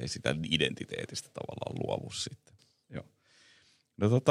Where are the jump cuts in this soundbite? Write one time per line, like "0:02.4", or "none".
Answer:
0:02.6